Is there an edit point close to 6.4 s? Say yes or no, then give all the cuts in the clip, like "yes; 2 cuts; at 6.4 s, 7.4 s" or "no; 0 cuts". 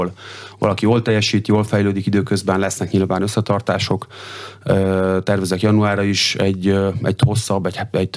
no; 0 cuts